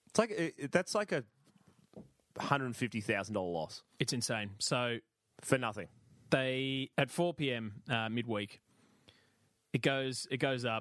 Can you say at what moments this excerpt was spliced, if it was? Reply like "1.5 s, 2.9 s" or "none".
6.9 s